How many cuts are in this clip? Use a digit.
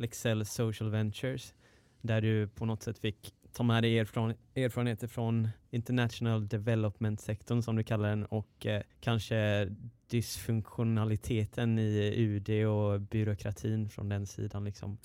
1